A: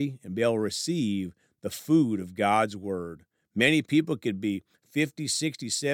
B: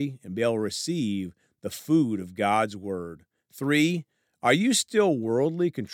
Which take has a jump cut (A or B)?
A